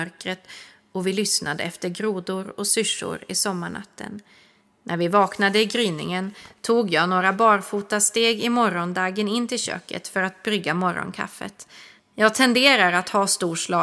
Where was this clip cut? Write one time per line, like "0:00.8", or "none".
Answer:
0:04.7
0:12.0